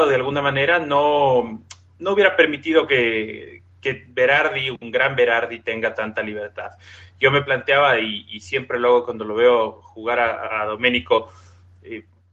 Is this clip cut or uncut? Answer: cut